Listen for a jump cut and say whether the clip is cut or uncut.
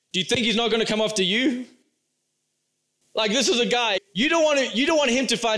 cut